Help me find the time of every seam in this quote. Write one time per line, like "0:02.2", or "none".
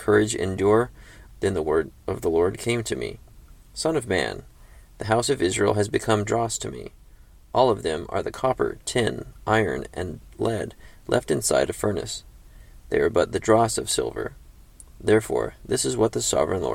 0:01.3